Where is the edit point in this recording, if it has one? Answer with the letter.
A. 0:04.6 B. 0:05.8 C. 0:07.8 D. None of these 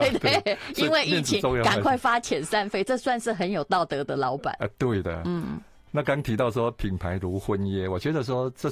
D